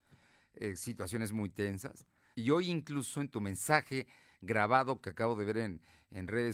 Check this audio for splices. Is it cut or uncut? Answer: cut